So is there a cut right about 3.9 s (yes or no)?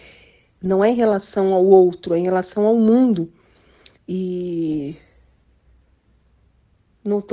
yes